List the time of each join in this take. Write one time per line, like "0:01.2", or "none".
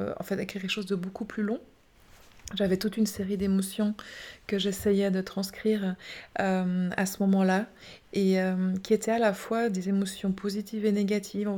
none